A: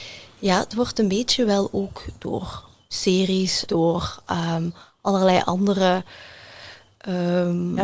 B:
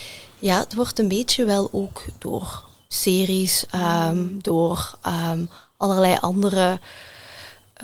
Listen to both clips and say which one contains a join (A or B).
A